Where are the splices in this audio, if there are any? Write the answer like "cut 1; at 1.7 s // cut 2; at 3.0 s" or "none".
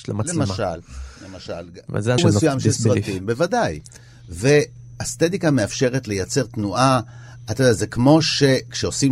cut 1; at 2.2 s